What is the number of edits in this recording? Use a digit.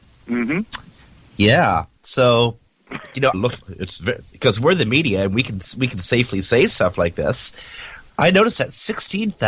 2